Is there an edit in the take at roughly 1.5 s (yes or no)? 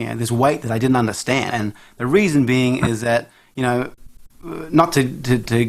yes